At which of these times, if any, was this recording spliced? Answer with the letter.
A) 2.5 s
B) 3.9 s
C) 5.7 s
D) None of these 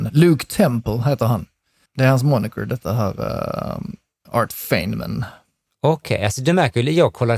D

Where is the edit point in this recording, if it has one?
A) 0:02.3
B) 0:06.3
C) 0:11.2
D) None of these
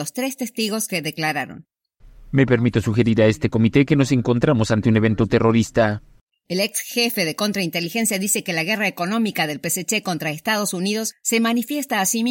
B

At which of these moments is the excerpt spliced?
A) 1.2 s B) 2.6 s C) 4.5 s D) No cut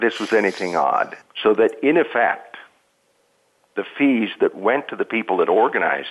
A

